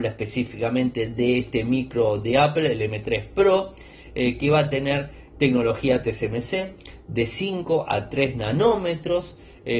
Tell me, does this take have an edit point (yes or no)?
no